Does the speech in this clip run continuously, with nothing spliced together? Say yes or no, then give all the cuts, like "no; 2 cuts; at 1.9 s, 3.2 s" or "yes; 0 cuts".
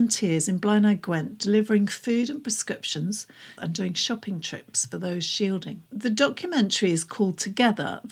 no; 2 cuts; at 3.6 s, 5.9 s